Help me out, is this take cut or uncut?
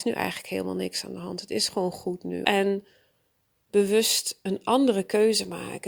cut